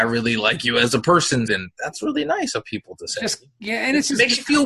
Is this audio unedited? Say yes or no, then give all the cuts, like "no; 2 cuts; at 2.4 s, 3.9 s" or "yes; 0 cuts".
no; 1 cut; at 1.5 s